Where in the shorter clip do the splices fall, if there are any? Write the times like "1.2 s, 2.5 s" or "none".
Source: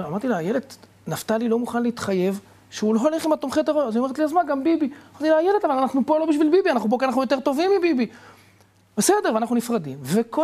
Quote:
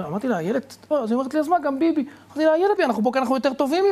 0.9 s, 2.8 s